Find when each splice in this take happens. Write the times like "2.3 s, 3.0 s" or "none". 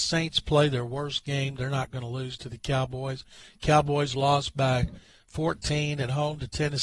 none

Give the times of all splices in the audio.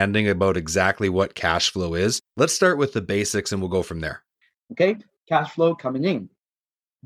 4.5 s

